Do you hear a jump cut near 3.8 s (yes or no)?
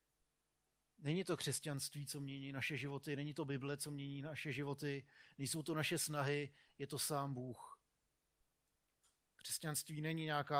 no